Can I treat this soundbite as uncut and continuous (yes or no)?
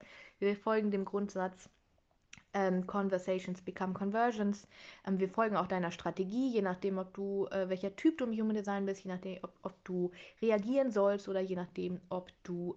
yes